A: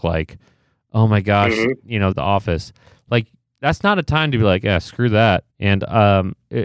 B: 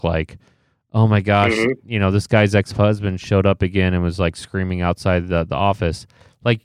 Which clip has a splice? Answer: A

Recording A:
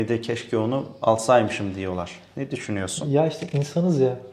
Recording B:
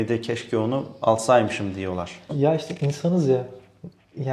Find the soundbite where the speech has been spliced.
B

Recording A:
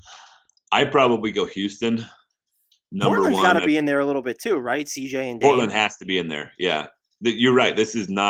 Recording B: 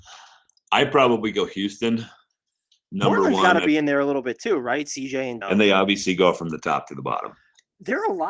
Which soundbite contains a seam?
B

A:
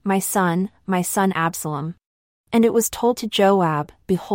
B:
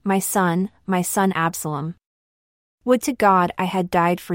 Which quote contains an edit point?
A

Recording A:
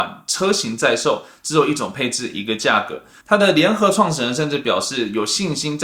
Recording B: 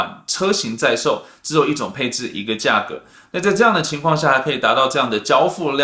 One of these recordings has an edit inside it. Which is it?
A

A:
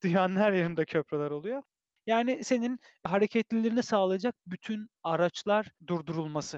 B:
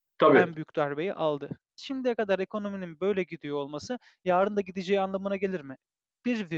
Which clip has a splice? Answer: B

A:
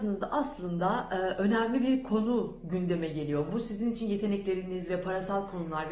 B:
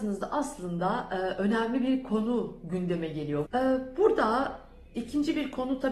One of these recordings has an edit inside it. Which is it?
B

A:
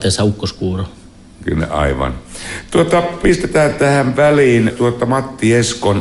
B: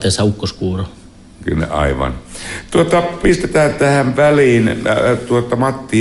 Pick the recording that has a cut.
A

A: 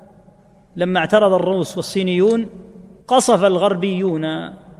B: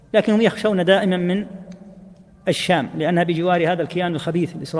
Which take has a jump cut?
A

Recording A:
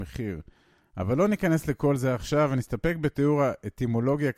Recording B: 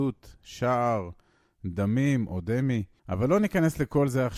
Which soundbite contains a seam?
B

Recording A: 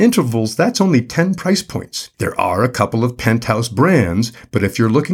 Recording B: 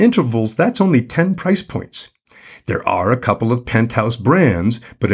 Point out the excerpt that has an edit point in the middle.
A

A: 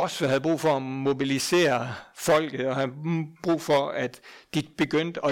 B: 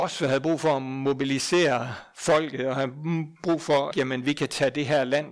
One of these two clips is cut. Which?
B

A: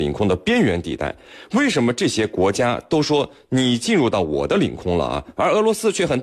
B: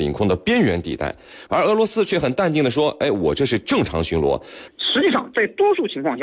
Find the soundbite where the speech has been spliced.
B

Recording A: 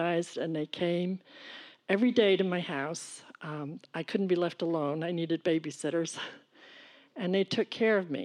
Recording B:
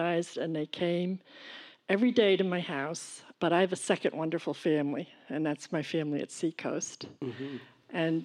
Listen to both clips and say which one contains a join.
B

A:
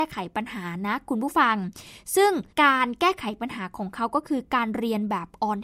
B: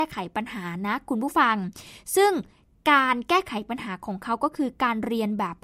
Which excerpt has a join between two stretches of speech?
A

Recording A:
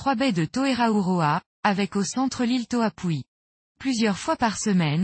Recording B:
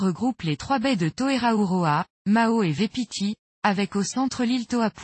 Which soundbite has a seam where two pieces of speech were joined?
A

